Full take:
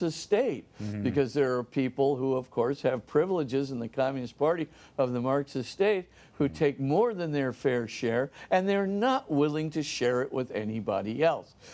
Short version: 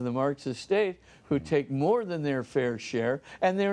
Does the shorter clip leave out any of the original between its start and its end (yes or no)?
no